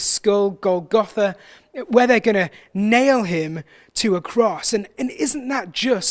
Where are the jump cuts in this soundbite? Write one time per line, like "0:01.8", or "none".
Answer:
0:04.7